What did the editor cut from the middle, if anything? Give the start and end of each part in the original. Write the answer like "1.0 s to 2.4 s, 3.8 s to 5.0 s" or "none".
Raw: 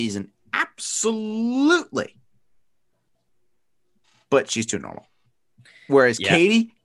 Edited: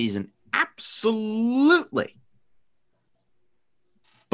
none